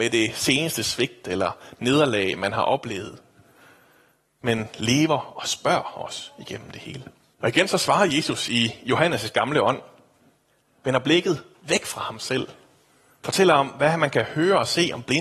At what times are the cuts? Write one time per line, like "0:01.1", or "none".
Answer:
0:07.3